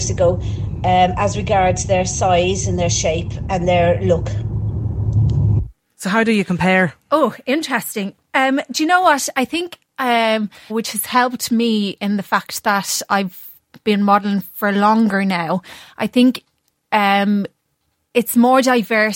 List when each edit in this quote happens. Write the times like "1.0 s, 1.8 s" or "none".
10.7 s